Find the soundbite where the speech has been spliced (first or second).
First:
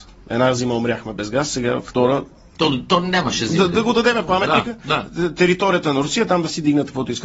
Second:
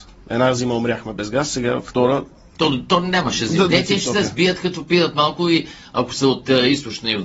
second